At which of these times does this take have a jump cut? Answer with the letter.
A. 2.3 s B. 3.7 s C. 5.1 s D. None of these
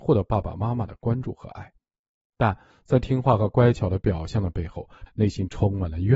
C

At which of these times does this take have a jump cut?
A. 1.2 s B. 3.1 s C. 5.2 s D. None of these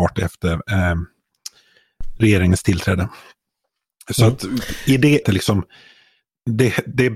C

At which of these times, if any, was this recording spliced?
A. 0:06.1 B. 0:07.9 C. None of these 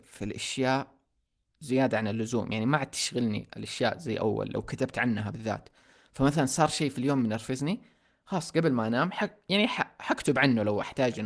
C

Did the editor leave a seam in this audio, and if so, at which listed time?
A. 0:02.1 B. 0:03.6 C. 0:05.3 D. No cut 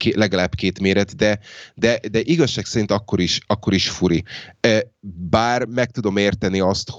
D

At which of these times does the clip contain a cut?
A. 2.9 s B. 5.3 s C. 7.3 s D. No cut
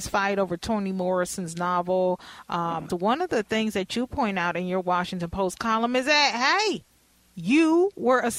A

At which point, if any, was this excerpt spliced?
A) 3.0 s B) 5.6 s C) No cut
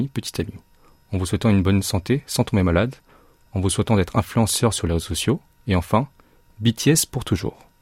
C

